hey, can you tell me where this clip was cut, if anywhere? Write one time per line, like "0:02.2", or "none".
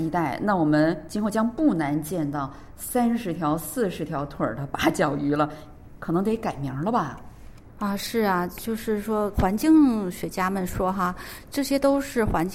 0:09.3